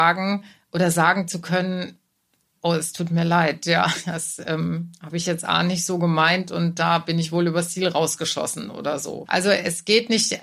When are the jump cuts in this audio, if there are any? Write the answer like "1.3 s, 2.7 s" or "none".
9.3 s